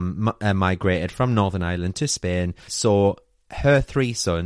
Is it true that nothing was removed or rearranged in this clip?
no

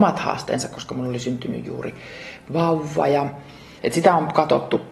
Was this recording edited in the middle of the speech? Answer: yes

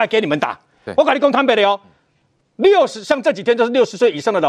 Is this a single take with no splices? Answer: yes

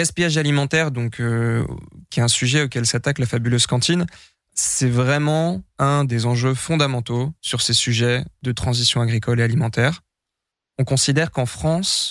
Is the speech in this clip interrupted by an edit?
no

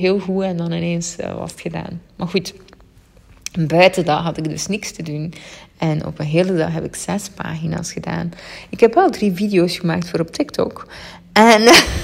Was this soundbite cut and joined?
no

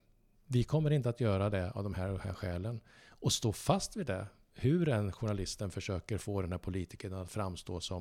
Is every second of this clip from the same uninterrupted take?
yes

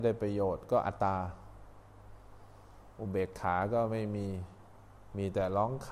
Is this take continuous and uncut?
no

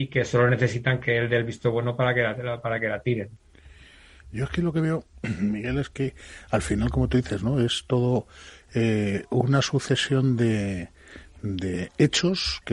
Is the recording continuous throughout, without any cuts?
yes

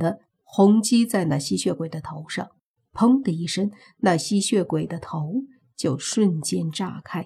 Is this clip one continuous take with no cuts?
yes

